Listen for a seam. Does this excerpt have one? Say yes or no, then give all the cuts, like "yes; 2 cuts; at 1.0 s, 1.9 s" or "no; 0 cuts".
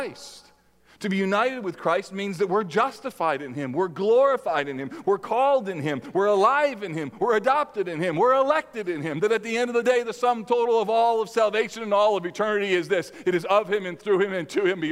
yes; 2 cuts; at 5.0 s, 7.2 s